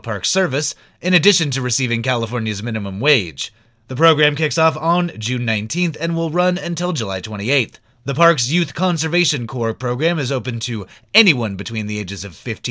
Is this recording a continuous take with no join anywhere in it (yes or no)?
yes